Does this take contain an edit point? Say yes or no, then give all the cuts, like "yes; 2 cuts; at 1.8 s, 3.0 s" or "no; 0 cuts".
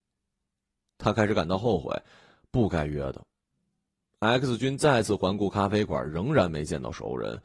no; 0 cuts